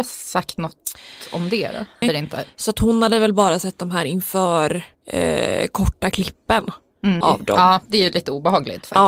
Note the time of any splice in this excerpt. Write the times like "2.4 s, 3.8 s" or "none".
2.0 s, 4.9 s, 7.2 s